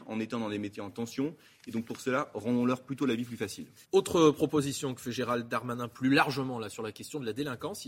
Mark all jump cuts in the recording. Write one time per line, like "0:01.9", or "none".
0:03.8